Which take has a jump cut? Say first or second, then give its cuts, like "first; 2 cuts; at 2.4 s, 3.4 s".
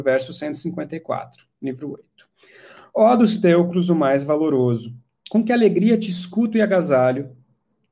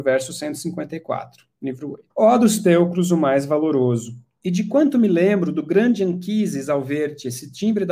second; 2 cuts; at 2.1 s, 4.4 s